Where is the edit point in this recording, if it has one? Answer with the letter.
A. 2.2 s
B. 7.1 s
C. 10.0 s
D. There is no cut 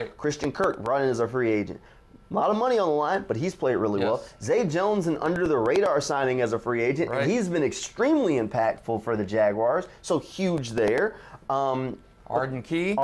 D